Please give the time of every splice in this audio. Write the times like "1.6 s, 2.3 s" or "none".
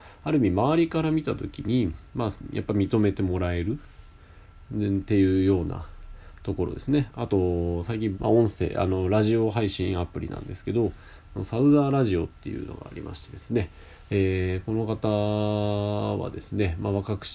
7.1 s, 8.1 s